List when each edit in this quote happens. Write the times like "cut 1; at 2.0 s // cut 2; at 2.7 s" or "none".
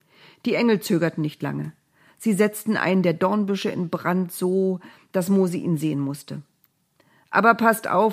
none